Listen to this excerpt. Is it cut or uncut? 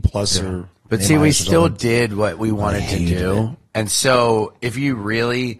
uncut